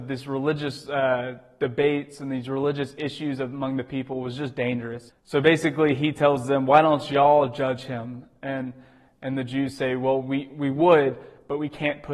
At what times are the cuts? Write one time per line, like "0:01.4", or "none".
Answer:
0:05.1

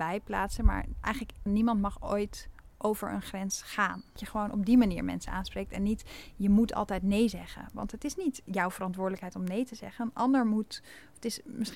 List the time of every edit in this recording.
0:01.5
0:02.7

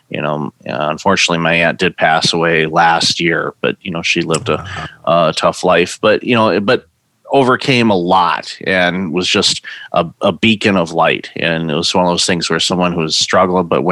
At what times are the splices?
none

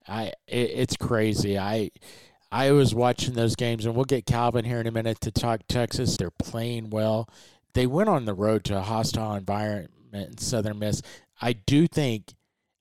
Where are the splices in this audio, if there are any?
0:06.2

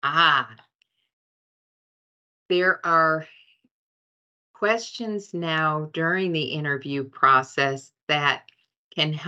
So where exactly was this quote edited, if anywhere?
none

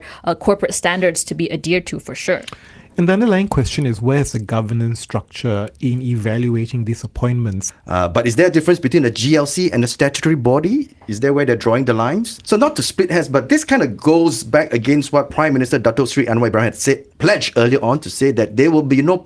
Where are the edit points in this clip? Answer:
0:07.7
0:12.4

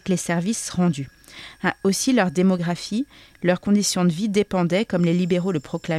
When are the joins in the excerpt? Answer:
none

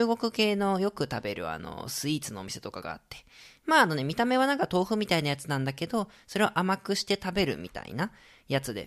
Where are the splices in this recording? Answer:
none

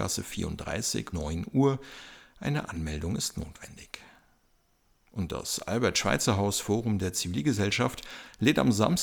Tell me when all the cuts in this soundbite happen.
0:01.1

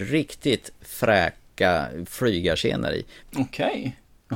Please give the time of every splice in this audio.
0:03.2

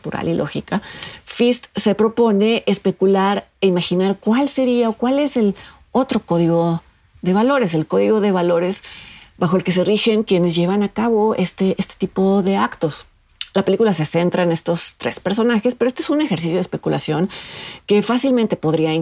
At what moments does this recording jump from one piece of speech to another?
none

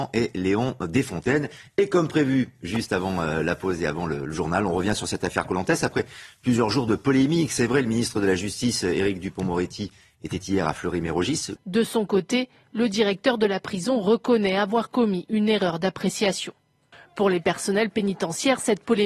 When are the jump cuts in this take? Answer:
0:11.5

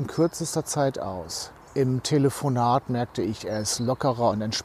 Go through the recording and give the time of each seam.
0:01.6

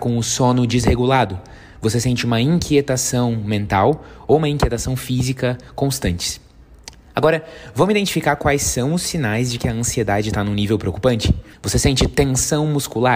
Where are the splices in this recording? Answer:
0:11.5

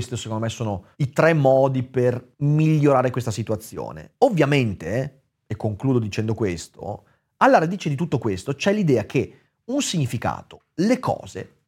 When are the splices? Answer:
0:00.9
0:02.3

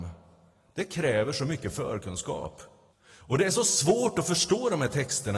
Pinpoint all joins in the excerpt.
0:02.9

